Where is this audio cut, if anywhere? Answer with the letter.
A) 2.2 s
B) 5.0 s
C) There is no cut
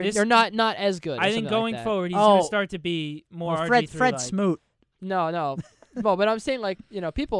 B